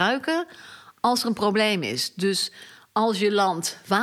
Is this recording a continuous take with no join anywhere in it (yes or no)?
yes